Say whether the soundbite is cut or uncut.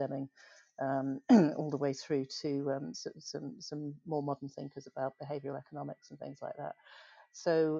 uncut